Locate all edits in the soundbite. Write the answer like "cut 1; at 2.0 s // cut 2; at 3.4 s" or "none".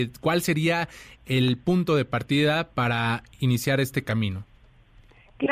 none